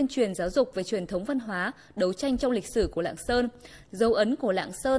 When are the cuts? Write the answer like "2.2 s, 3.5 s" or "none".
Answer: 3.8 s